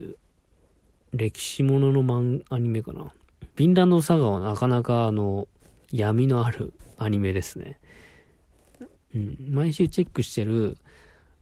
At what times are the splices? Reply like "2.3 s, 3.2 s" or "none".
3.5 s, 9.1 s